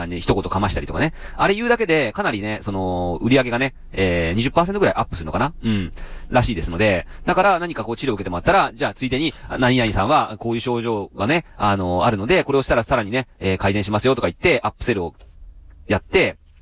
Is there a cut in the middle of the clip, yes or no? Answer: no